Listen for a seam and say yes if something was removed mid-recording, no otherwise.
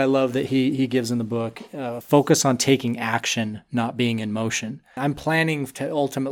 yes